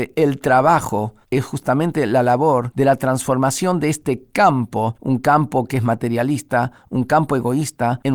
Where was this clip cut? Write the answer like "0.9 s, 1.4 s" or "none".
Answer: 5.0 s

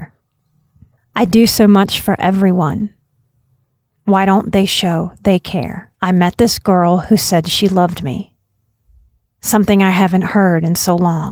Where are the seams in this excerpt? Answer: 1.0 s, 5.9 s

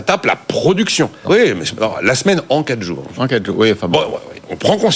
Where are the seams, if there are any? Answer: 1.2 s

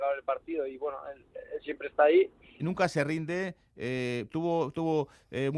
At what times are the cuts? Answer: 2.6 s, 4.3 s

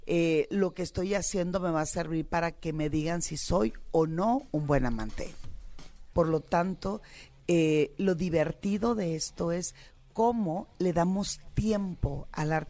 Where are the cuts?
6.1 s

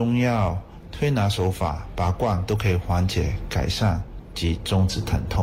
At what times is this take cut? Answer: none

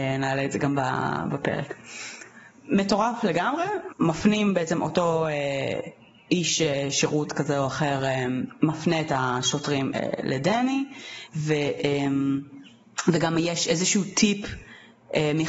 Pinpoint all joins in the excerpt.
3.9 s

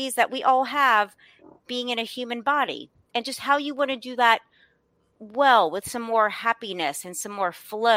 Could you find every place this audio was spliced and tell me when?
none

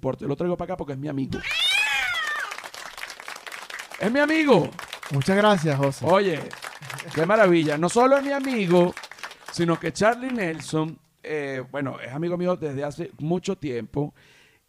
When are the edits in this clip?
11.2 s

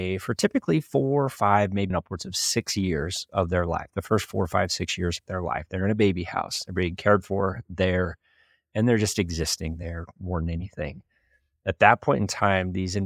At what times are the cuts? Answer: 1.9 s

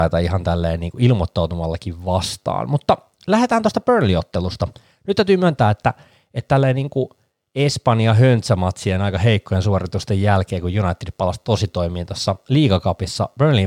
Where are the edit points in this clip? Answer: none

